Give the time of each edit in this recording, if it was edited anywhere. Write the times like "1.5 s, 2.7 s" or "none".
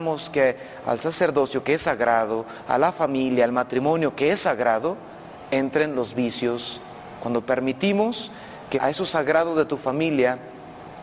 8.8 s